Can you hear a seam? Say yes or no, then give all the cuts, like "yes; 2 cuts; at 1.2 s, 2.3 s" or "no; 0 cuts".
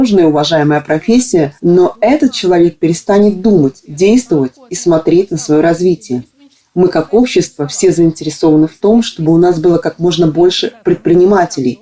yes; 1 cut; at 1.6 s